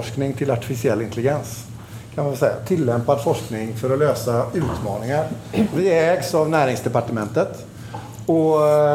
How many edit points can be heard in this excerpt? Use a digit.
0